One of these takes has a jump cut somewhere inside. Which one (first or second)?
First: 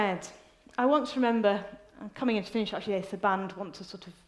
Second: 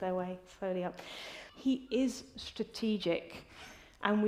second